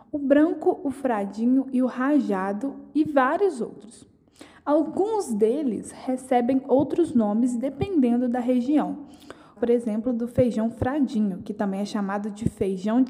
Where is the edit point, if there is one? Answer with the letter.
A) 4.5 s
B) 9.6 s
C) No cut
B